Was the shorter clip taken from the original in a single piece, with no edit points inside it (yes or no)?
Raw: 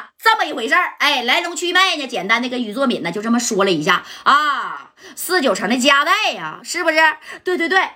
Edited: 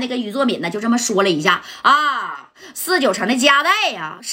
yes